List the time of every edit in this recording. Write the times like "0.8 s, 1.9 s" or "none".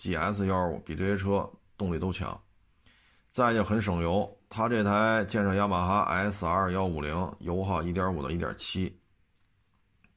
none